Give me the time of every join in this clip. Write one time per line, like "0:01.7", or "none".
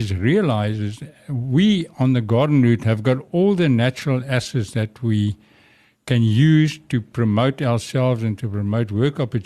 none